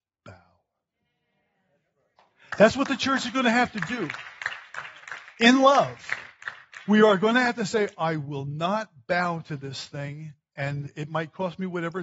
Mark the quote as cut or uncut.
uncut